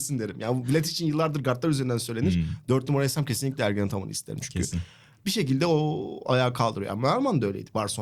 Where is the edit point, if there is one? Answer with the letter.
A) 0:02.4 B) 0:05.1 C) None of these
C